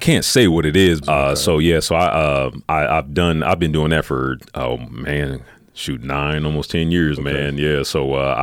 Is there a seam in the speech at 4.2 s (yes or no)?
no